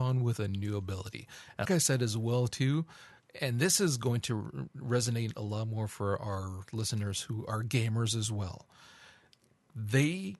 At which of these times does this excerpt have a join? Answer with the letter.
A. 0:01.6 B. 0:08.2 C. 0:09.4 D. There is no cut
A